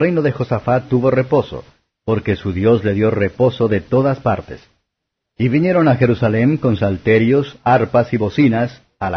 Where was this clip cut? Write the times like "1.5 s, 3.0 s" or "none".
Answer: 5.3 s

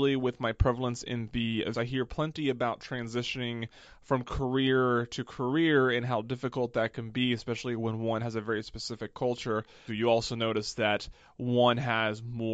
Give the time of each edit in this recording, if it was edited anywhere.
1.7 s, 9.9 s

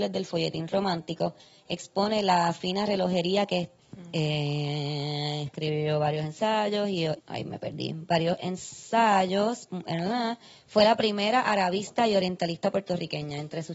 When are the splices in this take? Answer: 3.8 s, 7.2 s

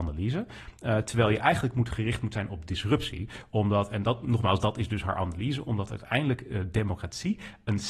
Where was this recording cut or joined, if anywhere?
none

